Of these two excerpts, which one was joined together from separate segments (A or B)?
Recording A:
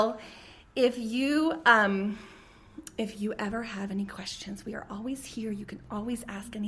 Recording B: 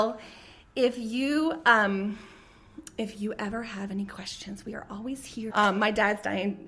B